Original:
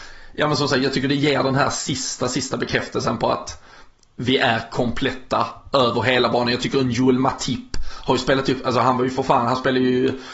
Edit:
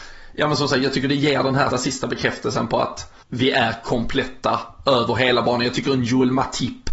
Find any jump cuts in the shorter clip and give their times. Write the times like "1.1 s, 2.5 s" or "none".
1.7 s, 3.2 s